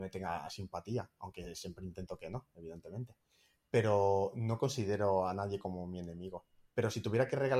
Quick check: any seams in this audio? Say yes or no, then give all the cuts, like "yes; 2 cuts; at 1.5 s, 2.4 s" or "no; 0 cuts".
no; 0 cuts